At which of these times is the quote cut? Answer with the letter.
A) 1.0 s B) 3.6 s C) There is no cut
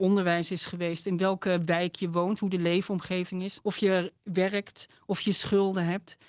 B